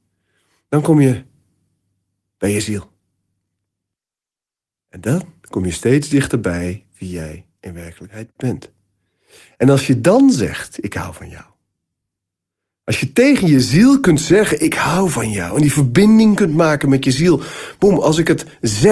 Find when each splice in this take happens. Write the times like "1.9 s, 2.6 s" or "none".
none